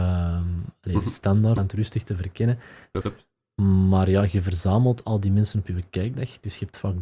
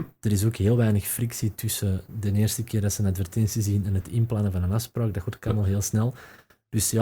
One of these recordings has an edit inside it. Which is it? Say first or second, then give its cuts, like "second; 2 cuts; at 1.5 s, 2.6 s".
first; 2 cuts; at 1.6 s, 3.0 s